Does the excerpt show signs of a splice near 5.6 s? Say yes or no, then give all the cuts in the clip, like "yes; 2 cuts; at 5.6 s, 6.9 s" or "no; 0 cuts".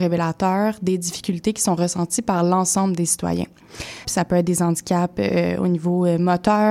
no; 1 cut; at 4.0 s